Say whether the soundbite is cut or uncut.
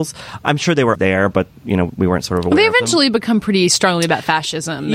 cut